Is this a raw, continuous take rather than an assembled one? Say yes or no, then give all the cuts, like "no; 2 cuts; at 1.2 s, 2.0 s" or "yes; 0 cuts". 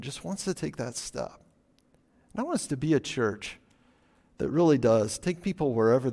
yes; 0 cuts